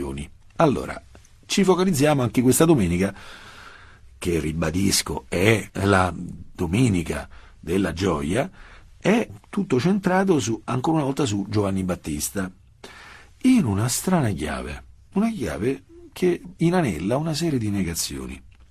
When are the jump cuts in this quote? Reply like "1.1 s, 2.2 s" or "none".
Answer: none